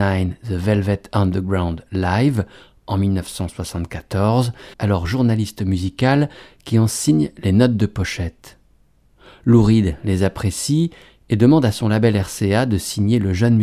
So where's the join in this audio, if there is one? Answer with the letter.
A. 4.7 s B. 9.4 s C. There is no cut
A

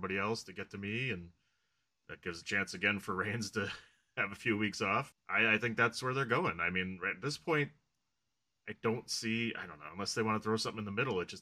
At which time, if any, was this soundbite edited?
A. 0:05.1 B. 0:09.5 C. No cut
A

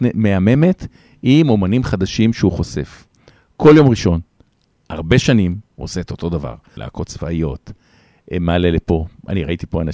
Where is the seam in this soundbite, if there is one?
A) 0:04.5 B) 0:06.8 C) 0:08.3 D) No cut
B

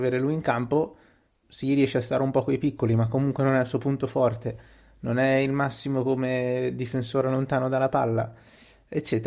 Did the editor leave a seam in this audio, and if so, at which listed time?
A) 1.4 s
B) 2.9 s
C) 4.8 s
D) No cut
A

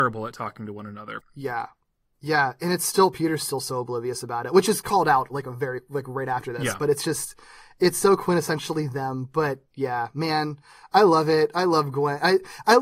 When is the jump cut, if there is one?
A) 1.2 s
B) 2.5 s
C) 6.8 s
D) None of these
A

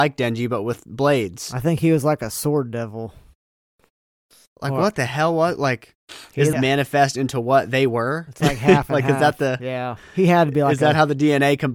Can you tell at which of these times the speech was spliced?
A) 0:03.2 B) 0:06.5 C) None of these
B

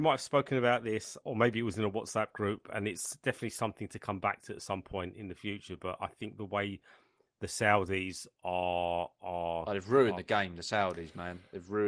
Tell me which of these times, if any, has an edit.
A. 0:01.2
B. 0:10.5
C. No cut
A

